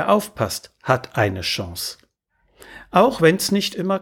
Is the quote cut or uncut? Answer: uncut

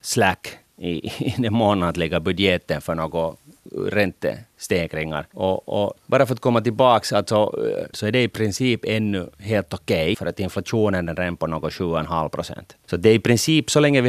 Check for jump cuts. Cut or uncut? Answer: cut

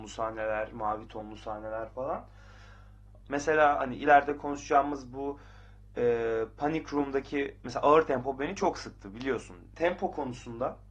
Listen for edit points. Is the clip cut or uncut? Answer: cut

